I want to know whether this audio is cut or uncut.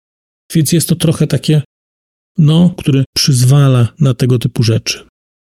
cut